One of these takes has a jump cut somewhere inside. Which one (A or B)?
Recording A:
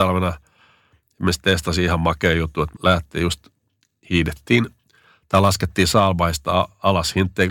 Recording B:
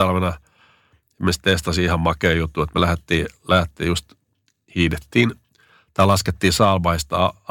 A